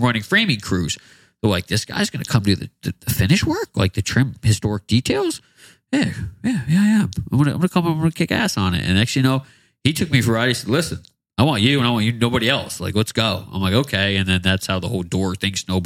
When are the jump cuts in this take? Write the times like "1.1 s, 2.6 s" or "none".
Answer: none